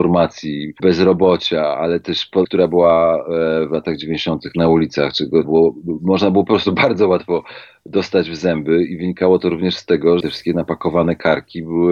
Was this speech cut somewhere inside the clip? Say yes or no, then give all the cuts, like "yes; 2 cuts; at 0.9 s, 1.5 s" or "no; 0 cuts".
yes; 3 cuts; at 2.4 s, 5.4 s, 10.2 s